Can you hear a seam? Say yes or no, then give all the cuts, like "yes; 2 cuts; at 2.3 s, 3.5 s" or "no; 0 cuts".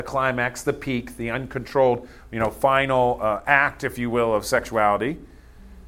no; 0 cuts